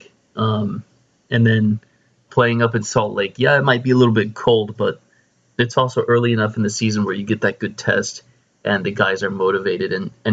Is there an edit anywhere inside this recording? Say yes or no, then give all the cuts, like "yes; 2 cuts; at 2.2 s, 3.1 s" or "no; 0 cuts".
yes; 1 cut; at 2.3 s